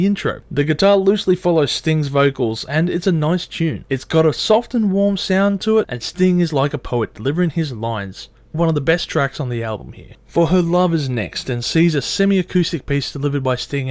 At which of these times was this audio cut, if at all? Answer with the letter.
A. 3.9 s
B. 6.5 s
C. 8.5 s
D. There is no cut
C